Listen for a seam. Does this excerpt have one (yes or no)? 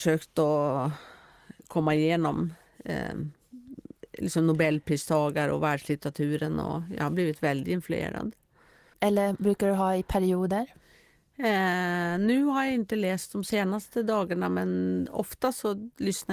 yes